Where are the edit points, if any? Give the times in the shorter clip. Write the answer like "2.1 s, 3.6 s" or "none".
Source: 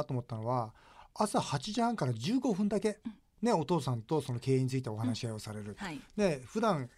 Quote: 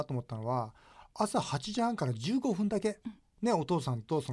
none